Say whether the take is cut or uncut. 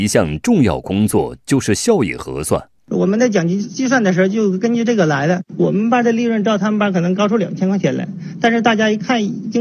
cut